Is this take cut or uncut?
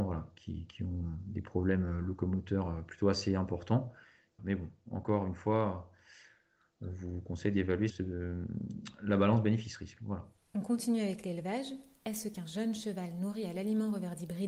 cut